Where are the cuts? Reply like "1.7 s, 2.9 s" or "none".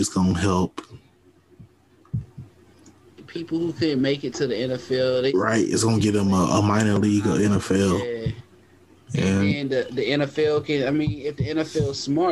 none